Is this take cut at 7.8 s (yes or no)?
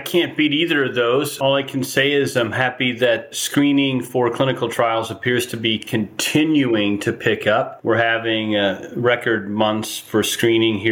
no